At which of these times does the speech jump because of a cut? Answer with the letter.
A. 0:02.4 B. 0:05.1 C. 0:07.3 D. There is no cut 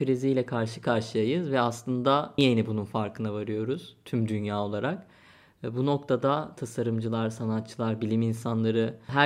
A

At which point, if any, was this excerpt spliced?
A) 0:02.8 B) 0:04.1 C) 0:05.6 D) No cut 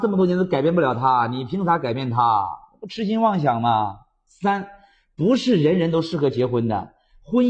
D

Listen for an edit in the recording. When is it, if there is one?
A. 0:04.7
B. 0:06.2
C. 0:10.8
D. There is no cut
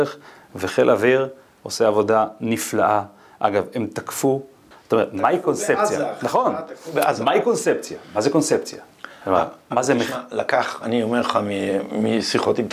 A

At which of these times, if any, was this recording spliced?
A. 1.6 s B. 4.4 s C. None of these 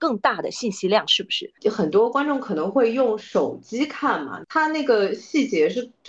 A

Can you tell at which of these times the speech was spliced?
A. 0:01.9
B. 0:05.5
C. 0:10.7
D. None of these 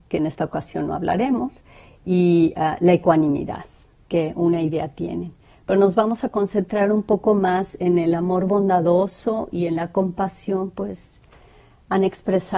D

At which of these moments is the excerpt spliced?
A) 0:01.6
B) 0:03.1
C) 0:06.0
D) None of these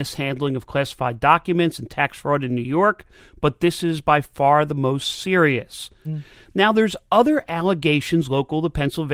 C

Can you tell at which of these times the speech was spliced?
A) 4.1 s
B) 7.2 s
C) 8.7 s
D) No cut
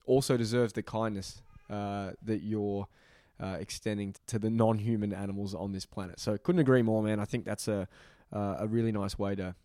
A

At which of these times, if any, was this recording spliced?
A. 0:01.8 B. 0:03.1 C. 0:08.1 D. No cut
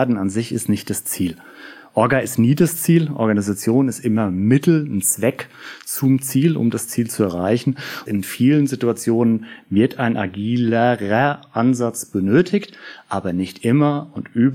C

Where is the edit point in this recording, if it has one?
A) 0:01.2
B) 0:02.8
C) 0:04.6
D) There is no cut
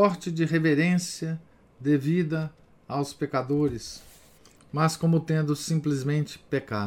C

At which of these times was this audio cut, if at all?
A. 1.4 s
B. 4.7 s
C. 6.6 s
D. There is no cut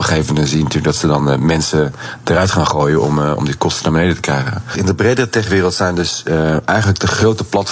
B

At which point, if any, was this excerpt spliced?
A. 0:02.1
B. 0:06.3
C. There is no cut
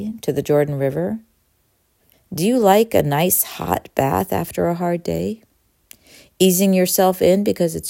A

